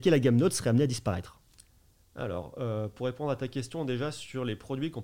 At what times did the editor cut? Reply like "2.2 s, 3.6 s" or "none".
none